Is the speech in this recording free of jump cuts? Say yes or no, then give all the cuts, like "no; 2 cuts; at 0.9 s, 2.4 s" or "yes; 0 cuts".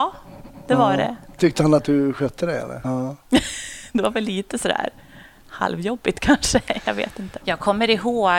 no; 2 cuts; at 2.8 s, 7.4 s